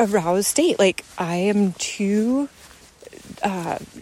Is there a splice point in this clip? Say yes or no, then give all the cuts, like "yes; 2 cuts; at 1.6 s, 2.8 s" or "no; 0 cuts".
no; 0 cuts